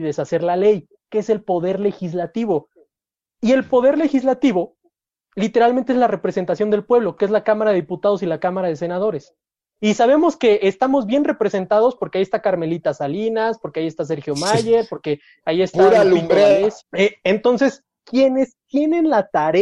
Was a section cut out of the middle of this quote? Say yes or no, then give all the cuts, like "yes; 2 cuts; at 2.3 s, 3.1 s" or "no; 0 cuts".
yes; 2 cuts; at 16.8 s, 18.0 s